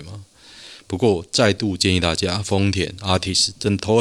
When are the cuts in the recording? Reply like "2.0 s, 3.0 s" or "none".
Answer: none